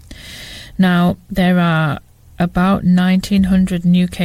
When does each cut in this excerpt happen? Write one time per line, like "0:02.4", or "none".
0:01.3

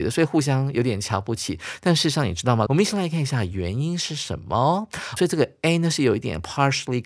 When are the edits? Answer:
0:02.7
0:05.2

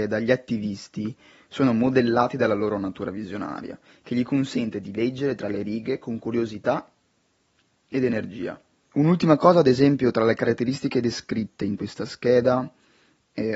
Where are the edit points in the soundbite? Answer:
0:08.8

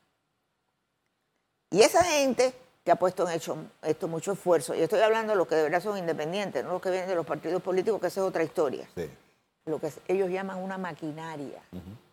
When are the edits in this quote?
0:09.6

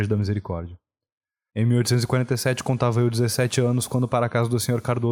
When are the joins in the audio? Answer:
0:01.5

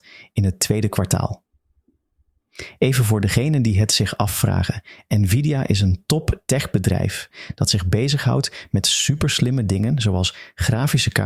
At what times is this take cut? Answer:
none

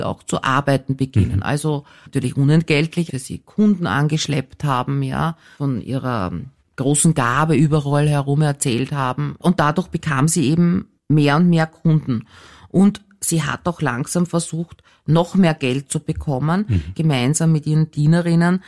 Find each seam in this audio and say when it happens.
0:03.1
0:11.0
0:16.9

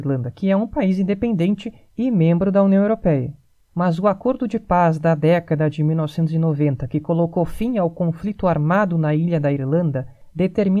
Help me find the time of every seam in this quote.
0:03.7

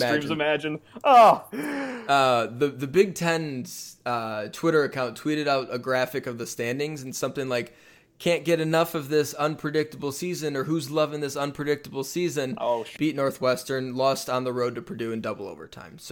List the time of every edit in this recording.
0:13.0

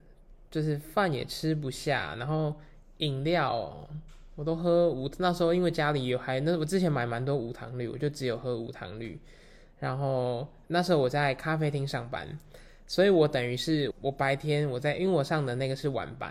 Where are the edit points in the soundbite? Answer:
0:13.9

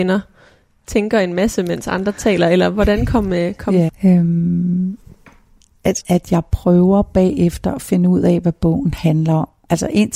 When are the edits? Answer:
0:03.9
0:06.0

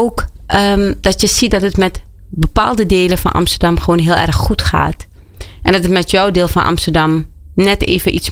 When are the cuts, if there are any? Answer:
none

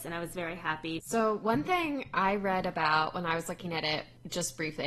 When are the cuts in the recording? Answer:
0:01.0

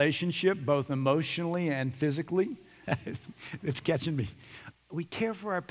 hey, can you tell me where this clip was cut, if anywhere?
0:02.8
0:04.7

